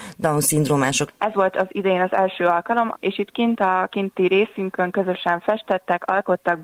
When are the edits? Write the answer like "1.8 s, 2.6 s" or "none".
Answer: 1.1 s, 2.9 s